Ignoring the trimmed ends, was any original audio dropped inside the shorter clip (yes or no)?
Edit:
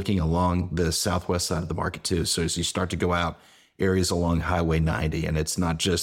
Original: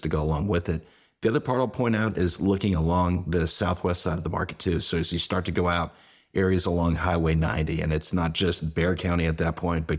no